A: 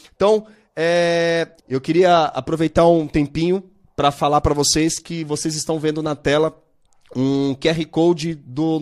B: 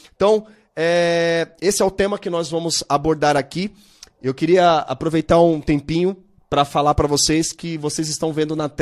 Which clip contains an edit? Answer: A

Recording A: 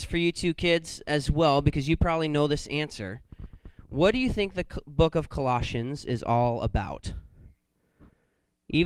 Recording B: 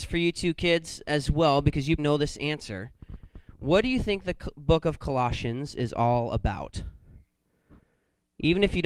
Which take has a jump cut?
B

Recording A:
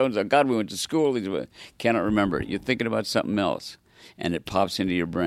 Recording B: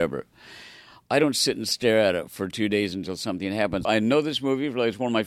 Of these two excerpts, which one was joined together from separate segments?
B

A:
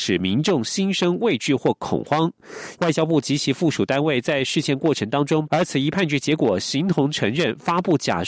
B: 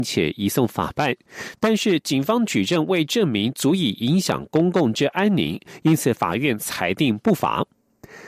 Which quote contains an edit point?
A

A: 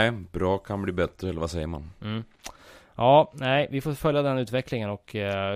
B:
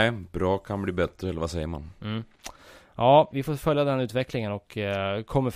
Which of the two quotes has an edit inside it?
B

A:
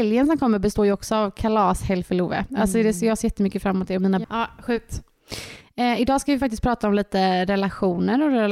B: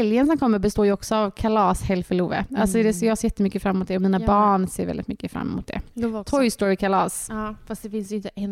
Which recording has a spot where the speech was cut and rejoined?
A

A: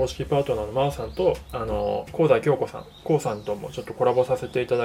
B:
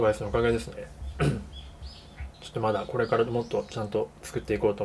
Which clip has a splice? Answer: B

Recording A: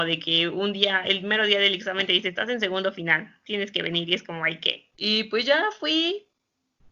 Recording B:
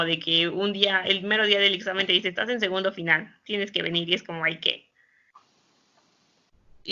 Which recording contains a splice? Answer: A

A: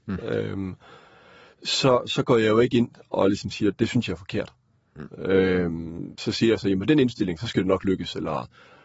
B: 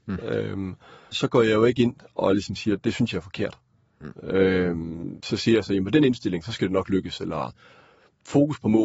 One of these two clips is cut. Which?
B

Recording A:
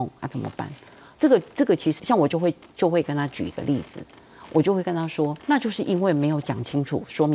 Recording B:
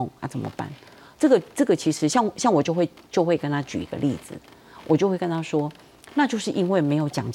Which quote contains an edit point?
A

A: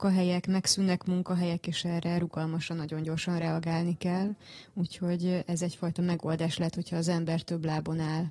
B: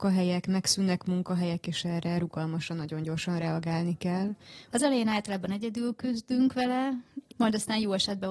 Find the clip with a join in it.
B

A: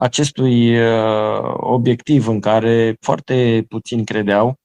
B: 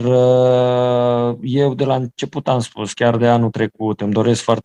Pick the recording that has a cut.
A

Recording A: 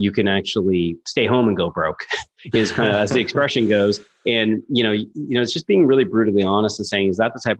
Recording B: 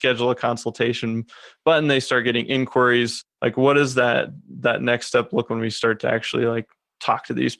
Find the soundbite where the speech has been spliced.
B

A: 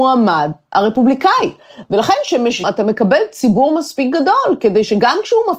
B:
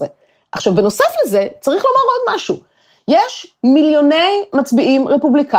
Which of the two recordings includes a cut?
A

